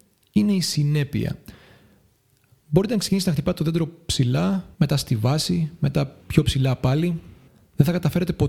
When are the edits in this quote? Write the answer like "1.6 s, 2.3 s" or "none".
4.7 s, 6.2 s